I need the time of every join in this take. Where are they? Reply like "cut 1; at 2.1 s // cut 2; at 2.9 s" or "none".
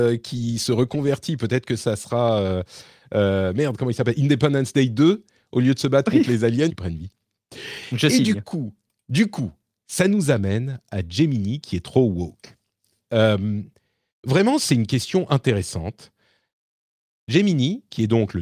cut 1; at 6.7 s